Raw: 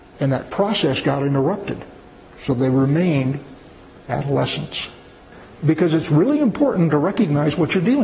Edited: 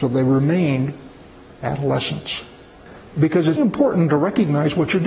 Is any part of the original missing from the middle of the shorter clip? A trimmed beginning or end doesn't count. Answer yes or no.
yes